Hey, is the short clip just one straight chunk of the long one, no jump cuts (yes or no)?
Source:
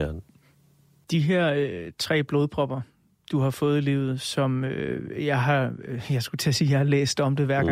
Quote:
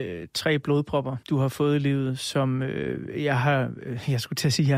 no